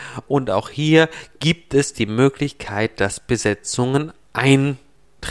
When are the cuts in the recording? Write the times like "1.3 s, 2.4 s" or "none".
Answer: none